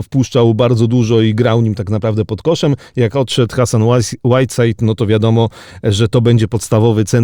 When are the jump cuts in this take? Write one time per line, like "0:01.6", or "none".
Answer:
none